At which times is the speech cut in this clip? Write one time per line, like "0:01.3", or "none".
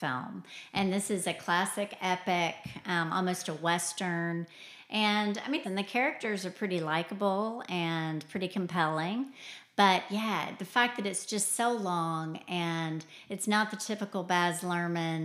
0:05.6